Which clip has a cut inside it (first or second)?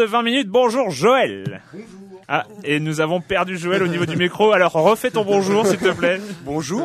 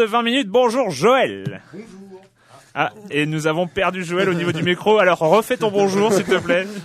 first